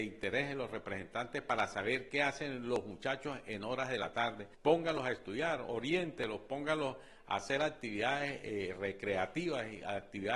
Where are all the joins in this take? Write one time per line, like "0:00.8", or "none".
0:04.5